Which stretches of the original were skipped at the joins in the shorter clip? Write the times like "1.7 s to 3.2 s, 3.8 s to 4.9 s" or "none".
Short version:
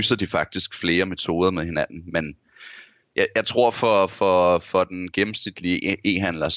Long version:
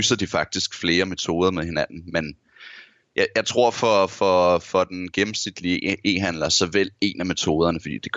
none